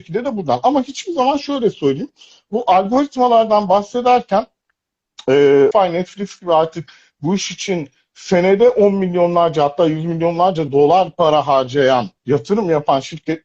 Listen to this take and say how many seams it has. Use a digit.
2